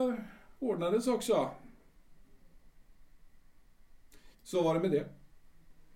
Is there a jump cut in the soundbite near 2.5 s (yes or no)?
no